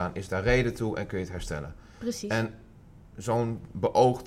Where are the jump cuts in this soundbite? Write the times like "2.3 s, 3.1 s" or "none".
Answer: none